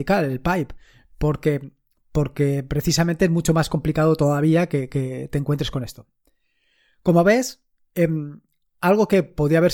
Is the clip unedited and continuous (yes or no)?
yes